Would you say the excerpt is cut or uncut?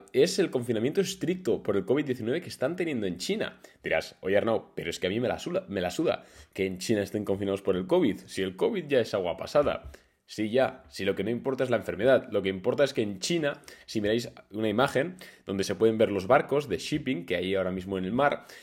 uncut